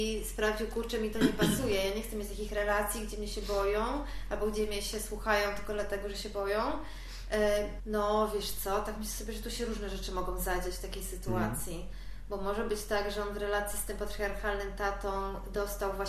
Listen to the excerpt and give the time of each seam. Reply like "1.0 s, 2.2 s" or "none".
7.8 s